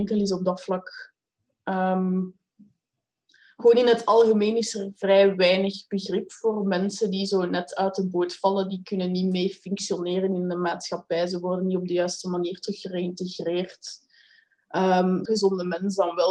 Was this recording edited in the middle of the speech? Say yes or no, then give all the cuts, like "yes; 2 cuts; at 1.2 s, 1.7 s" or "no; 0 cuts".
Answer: yes; 1 cut; at 15.3 s